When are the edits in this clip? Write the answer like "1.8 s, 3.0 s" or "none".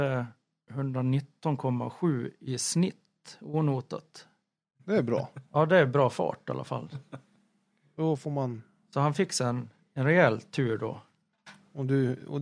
none